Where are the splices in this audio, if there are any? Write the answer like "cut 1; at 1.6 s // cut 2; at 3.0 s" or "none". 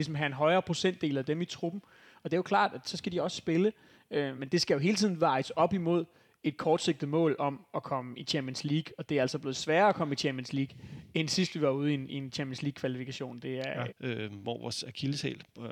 cut 1; at 4.4 s // cut 2; at 13.9 s